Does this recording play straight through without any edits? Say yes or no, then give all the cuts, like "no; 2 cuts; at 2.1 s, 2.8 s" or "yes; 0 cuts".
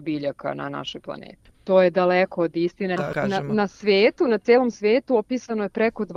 no; 2 cuts; at 1.5 s, 3.0 s